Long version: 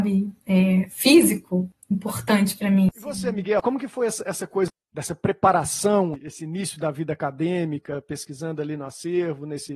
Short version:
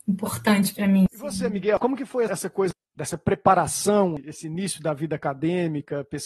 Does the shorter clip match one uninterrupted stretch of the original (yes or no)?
no